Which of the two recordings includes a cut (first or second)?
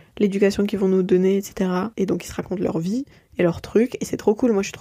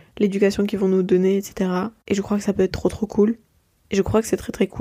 first